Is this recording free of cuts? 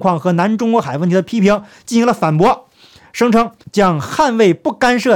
no; 1 cut; at 3.6 s

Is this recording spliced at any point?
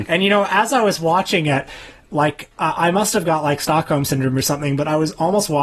no; 0 cuts

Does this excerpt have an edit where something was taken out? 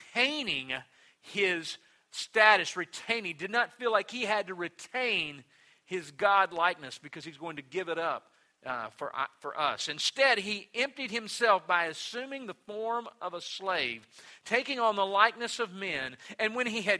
no; 0 cuts

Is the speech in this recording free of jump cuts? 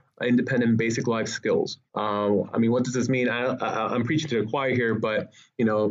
no; 1 cut; at 1.9 s

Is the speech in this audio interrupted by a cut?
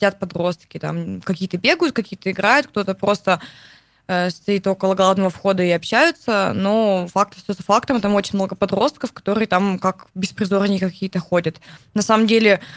no; 0 cuts

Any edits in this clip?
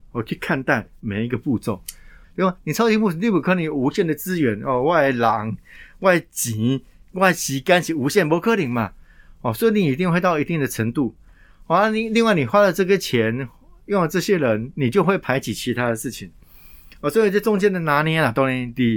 yes; 1 cut; at 2.2 s

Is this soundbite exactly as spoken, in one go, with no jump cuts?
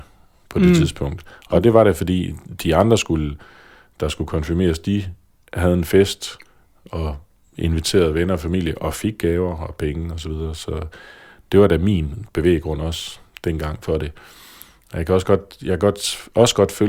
yes; 0 cuts

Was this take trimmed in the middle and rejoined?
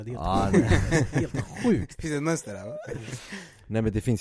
no; 0 cuts

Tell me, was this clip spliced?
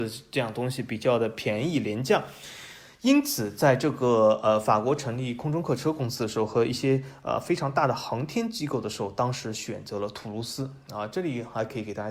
no; 0 cuts

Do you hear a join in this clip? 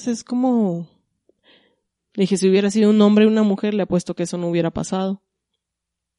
yes; 1 cut; at 2.0 s

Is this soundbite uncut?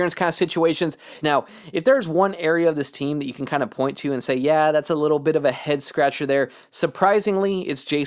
no; 1 cut; at 1.2 s

